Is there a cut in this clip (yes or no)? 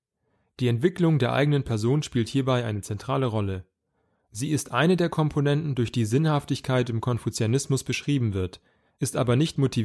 no